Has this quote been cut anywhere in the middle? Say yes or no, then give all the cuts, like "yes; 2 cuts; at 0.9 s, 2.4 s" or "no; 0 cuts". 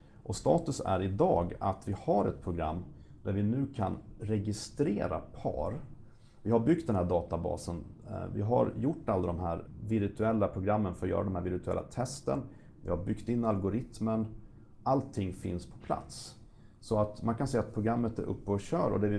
no; 0 cuts